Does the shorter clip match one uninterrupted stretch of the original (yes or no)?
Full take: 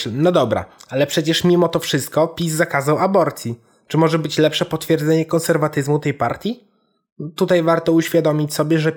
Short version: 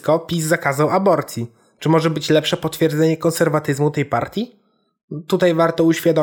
yes